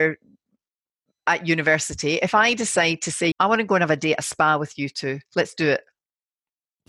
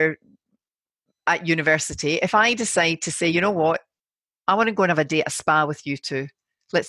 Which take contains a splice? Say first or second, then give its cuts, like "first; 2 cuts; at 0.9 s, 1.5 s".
first; 2 cuts; at 3.3 s, 5.3 s